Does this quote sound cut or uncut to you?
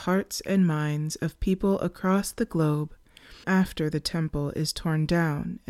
cut